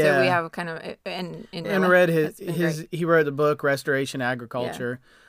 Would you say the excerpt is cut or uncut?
uncut